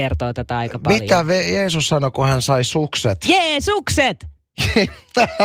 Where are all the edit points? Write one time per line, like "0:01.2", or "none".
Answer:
none

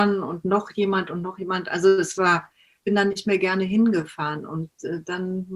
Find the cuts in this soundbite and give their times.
none

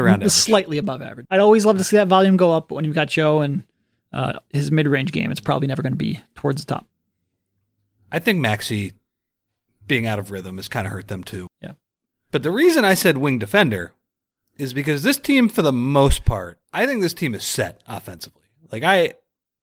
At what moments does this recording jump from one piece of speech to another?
0:01.3
0:11.5
0:16.6

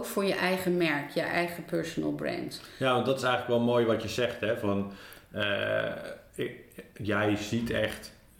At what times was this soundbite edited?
none

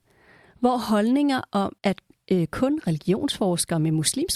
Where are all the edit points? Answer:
0:01.8

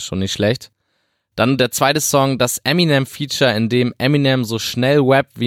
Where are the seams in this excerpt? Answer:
none

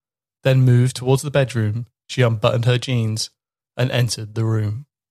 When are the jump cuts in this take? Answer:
0:03.6

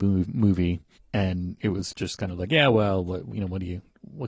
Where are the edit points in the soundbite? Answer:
0:01.0

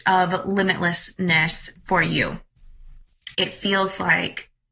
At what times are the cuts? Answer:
0:03.3

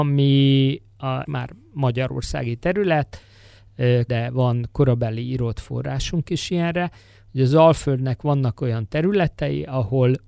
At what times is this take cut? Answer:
0:01.2
0:04.1

